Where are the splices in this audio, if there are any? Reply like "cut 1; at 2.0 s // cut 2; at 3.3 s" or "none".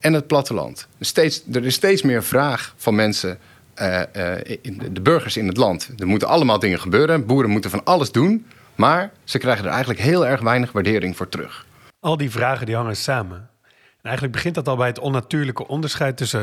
cut 1; at 0.9 s